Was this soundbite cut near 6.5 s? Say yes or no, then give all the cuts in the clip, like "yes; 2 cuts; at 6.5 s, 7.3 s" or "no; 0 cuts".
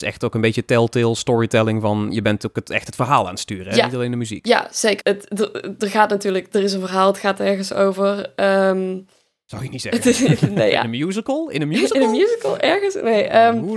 no; 1 cut; at 5.0 s